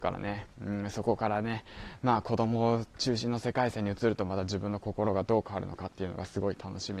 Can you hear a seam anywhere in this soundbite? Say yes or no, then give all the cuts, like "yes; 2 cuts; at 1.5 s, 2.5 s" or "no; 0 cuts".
no; 0 cuts